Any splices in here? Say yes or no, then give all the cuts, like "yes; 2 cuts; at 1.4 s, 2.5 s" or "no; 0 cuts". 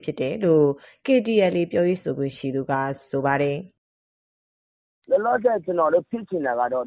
no; 0 cuts